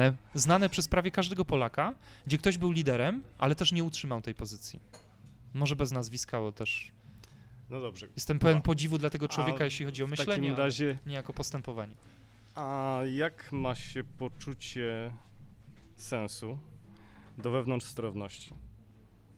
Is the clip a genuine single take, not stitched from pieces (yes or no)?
yes